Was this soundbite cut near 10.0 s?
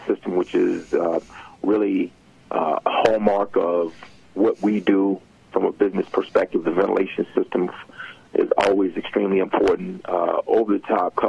no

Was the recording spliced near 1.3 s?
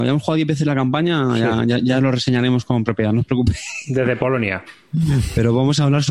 no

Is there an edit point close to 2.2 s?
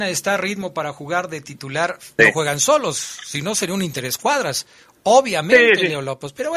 yes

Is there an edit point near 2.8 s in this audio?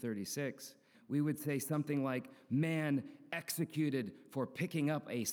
no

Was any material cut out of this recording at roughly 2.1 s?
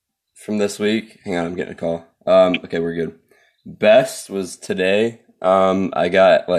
no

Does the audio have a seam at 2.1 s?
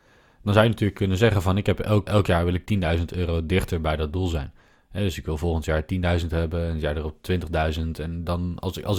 yes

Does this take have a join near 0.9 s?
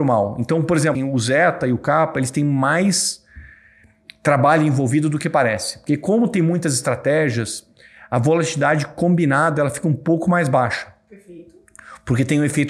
yes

